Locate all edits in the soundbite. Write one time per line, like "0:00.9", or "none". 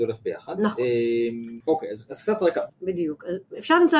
0:01.6
0:02.7